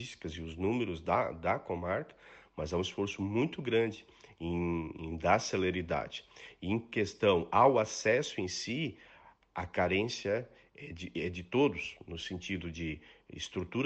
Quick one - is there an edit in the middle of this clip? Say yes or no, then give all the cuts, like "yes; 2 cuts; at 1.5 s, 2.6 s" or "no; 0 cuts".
no; 0 cuts